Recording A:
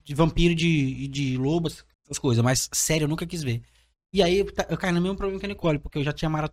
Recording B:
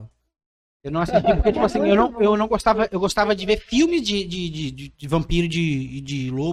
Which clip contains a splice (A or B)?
A